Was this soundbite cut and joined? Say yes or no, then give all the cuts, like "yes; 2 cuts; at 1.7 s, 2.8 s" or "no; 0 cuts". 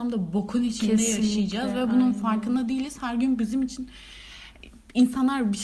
no; 0 cuts